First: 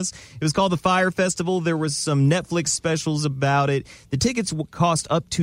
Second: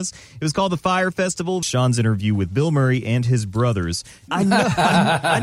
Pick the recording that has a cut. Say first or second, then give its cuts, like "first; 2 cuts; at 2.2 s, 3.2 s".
second; 2 cuts; at 1.6 s, 4.3 s